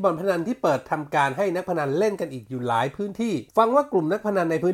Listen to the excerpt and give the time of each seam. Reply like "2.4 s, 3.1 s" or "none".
3.5 s